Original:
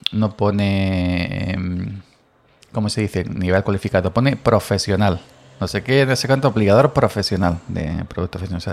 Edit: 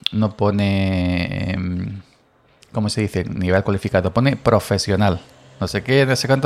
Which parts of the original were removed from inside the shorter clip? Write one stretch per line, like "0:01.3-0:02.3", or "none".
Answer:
none